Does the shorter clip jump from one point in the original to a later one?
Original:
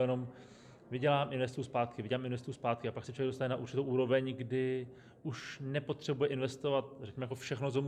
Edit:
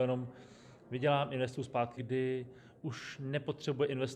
yes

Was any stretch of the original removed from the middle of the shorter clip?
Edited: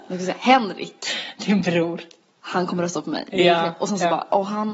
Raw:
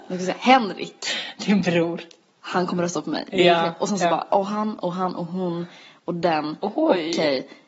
no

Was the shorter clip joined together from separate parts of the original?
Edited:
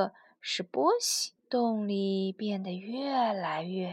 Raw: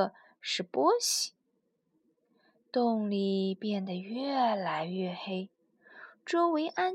yes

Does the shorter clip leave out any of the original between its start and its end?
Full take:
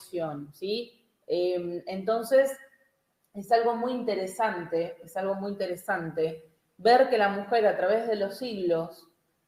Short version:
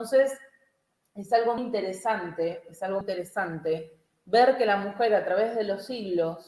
yes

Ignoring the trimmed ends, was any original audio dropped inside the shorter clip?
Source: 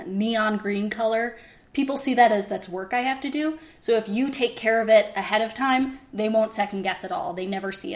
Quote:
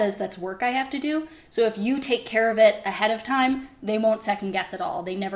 no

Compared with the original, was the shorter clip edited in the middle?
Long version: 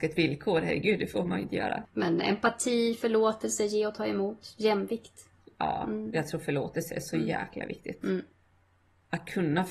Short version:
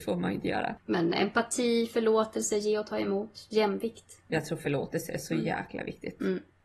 yes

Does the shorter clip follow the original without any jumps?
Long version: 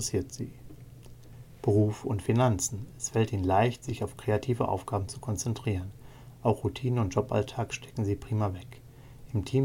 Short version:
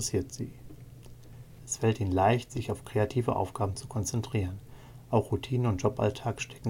no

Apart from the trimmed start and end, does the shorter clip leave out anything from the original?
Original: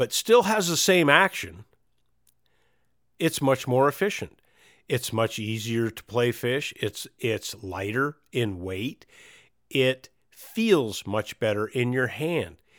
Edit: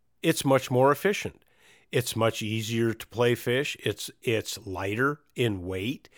no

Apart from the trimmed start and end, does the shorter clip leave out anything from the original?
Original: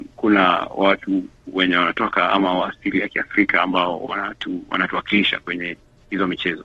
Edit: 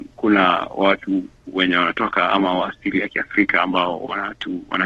no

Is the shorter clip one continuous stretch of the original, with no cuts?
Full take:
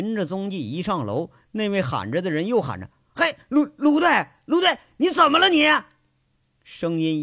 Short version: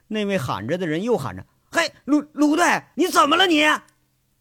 no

